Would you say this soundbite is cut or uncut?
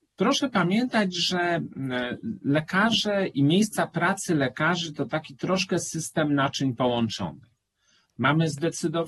uncut